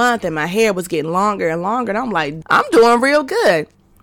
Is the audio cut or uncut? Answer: cut